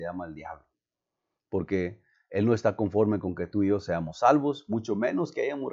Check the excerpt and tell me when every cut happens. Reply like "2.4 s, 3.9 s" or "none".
none